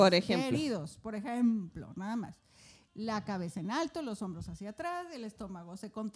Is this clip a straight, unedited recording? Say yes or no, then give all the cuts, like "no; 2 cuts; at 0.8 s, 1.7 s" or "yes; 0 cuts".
yes; 0 cuts